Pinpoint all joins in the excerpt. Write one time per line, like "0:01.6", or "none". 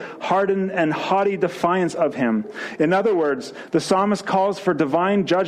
none